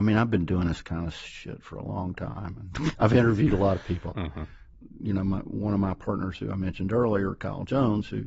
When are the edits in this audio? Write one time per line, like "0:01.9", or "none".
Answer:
0:02.9
0:04.1